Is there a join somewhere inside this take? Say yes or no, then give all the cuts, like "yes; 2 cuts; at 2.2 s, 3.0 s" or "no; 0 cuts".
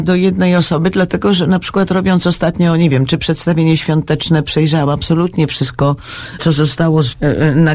no; 0 cuts